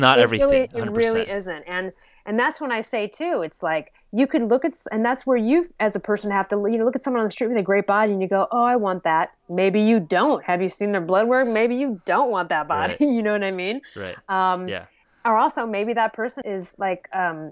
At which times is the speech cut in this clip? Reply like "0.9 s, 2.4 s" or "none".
16.4 s